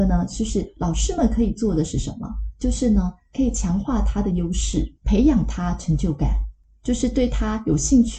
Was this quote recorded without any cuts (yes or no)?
no